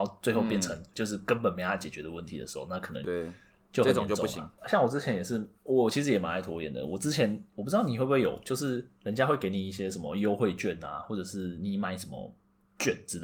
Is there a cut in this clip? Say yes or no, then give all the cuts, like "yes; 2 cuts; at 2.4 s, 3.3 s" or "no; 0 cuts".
yes; 1 cut; at 3.0 s